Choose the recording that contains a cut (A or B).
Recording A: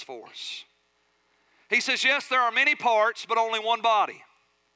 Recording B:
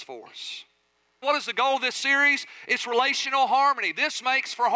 B